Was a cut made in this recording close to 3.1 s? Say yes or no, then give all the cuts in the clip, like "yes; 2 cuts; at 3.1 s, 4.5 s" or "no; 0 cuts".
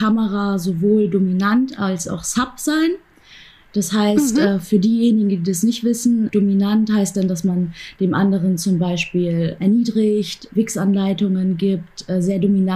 no; 0 cuts